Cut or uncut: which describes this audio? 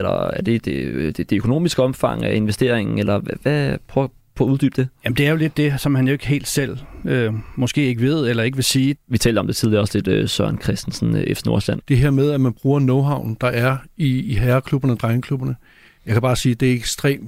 cut